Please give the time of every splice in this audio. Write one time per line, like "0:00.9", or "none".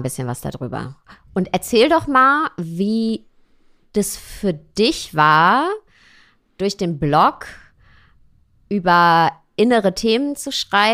none